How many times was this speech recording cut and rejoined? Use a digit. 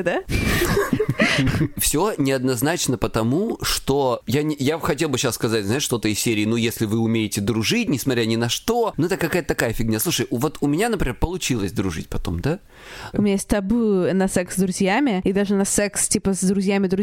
1